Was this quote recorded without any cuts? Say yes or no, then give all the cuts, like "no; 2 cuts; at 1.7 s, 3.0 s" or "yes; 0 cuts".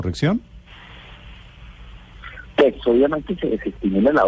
yes; 0 cuts